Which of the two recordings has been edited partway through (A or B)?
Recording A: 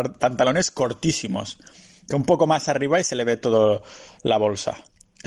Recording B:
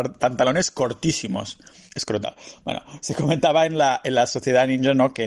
B